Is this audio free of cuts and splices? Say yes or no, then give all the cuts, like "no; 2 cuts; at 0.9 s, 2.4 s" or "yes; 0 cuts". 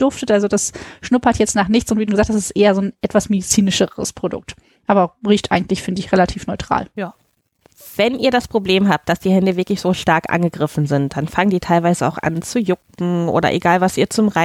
no; 1 cut; at 2.1 s